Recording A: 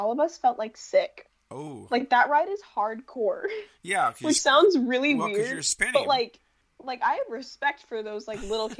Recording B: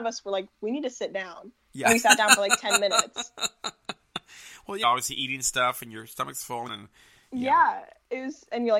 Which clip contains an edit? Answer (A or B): B